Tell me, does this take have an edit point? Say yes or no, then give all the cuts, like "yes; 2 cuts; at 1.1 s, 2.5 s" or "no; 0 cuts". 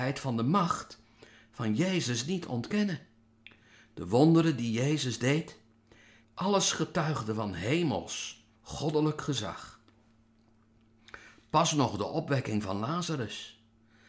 yes; 2 cuts; at 6.2 s, 8.5 s